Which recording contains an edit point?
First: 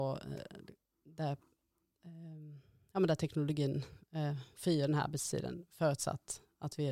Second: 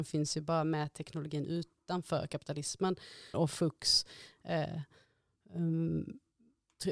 second; 1 cut; at 3.3 s

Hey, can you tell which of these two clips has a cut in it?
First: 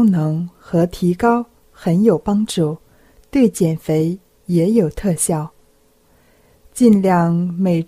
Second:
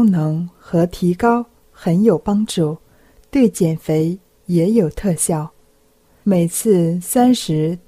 second; 1 cut; at 6.2 s

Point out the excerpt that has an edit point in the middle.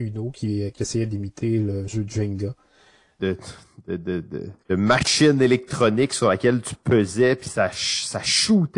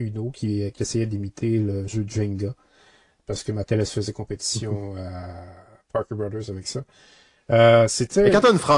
first; 2 cuts; at 3.2 s, 4.6 s

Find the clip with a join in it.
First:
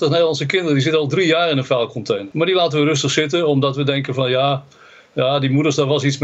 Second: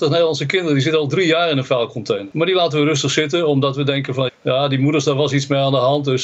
second; 1 cut; at 4.3 s

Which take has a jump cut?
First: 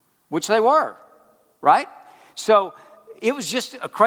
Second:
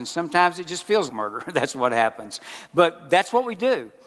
second; 1 cut; at 1.1 s

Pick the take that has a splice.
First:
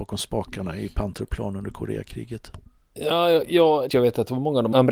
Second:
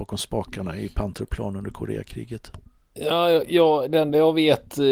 first; 1 cut; at 3.9 s

